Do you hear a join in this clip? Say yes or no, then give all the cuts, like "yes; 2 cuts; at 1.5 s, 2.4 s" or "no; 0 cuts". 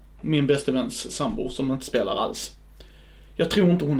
no; 0 cuts